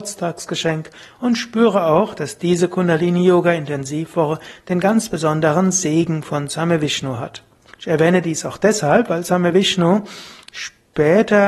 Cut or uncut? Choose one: cut